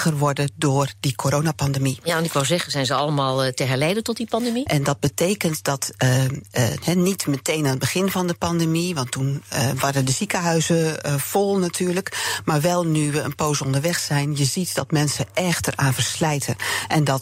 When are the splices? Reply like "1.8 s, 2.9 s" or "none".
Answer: 4.7 s